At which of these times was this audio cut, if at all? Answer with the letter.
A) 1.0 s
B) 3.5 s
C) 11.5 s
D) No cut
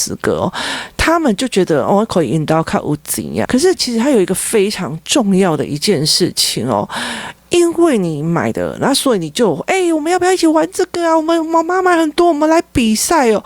B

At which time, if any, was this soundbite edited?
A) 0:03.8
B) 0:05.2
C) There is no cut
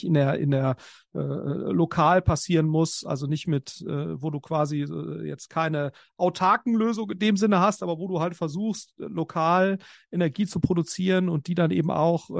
C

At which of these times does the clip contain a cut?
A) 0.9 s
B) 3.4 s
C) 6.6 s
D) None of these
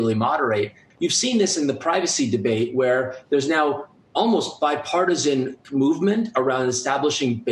A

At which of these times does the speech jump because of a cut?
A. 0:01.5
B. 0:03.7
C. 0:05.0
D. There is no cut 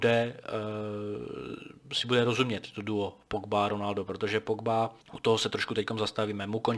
C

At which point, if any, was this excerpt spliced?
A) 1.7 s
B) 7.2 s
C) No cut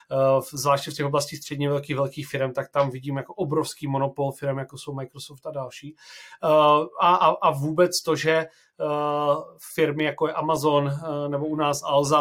C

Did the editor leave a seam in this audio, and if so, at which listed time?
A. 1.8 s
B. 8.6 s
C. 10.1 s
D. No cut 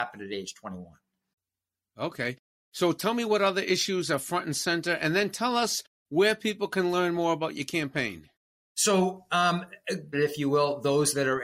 C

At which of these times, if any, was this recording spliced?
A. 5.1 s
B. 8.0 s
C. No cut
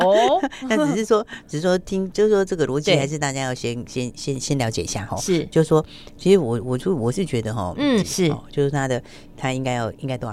B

